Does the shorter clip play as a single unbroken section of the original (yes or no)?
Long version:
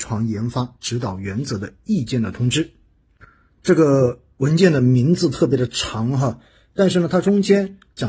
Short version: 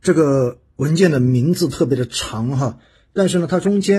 yes